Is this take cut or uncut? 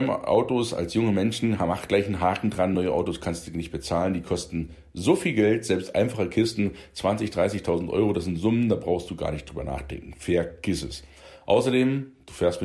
uncut